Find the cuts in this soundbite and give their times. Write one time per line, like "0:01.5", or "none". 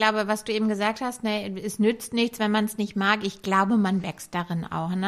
none